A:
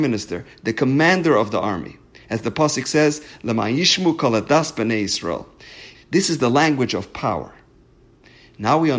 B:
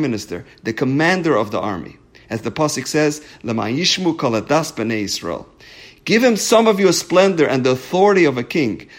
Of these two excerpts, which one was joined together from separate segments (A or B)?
A